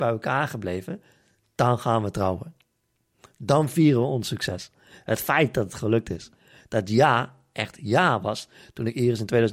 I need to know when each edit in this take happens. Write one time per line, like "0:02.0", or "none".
none